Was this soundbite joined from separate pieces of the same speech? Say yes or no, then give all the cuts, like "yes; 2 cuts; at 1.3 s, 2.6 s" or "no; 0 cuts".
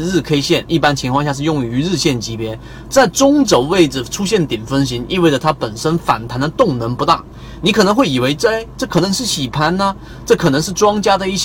yes; 1 cut; at 2.9 s